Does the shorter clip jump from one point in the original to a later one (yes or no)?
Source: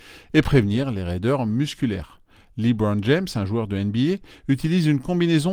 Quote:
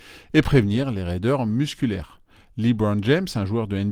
no